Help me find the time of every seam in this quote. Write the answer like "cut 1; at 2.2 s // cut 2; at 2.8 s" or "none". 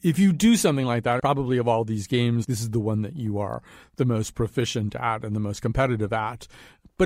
cut 1; at 1.2 s // cut 2; at 2.4 s